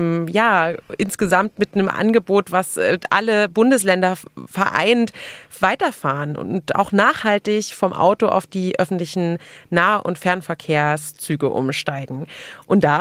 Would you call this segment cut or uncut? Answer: uncut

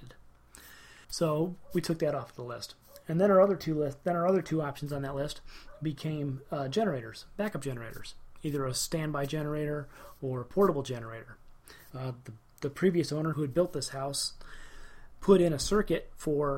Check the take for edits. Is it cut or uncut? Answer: cut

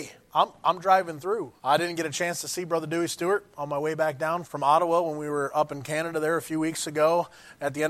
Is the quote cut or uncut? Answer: cut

